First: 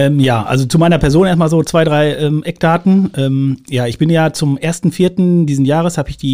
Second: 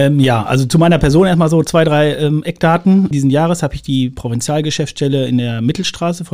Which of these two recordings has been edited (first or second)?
second